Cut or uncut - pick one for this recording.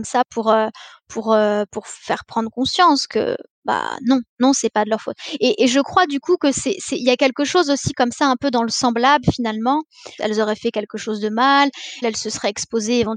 cut